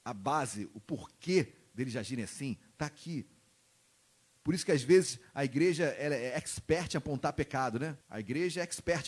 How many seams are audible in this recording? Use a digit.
1